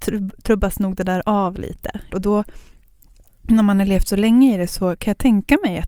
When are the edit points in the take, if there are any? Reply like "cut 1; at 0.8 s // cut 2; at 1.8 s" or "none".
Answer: cut 1; at 2.1 s